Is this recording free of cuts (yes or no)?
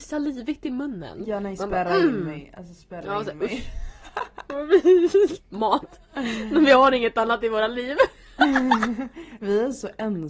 yes